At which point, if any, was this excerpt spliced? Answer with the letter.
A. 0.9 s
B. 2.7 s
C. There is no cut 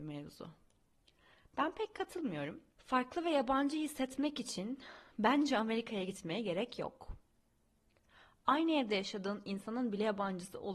B